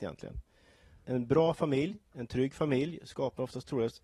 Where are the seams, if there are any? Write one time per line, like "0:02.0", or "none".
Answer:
0:01.0